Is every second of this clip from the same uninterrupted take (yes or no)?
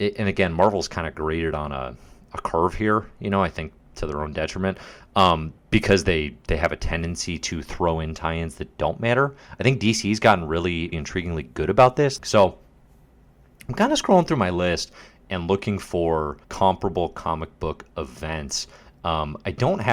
no